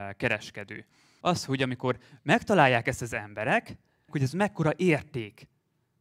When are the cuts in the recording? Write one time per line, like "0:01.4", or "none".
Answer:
0:01.2
0:04.1